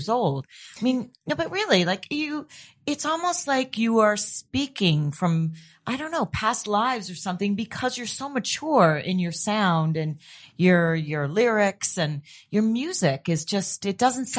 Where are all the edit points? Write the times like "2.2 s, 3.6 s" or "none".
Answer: none

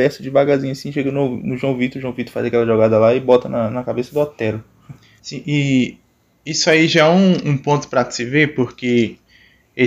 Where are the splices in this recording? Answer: 5.2 s

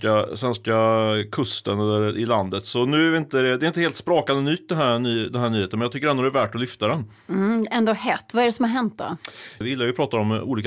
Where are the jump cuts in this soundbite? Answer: 9.6 s

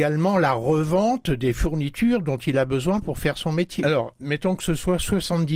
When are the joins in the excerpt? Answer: 3.8 s

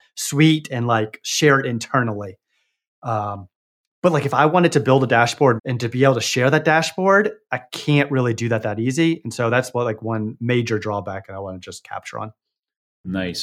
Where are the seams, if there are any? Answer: 5.6 s

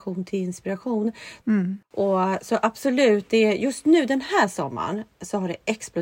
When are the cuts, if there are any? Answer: 1.4 s

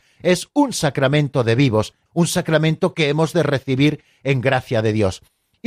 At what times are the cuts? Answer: 2.1 s

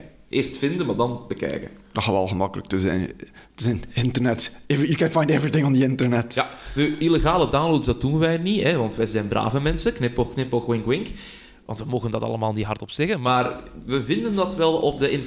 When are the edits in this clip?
none

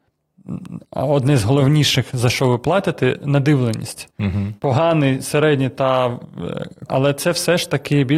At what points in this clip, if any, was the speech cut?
4.6 s, 6.9 s

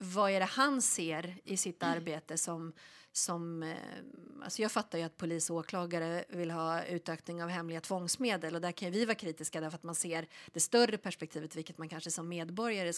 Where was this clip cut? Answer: none

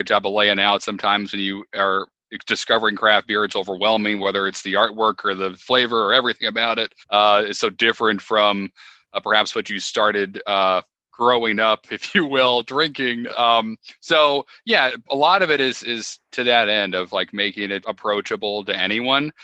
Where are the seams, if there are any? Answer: 7.0 s, 13.3 s, 17.8 s

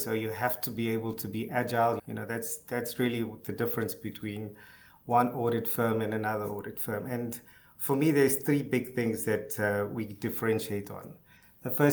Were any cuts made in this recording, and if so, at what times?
2.0 s

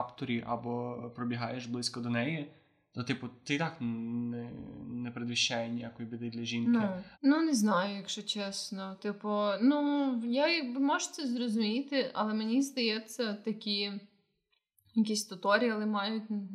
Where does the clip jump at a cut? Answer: 7.1 s

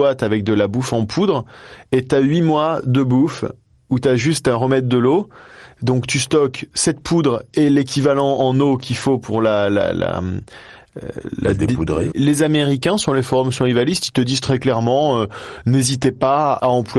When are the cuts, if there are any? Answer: 12.1 s

